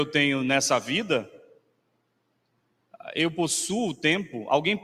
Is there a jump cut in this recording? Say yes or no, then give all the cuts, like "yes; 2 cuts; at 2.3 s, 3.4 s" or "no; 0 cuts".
no; 0 cuts